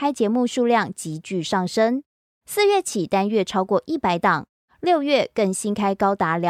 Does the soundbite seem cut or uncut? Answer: uncut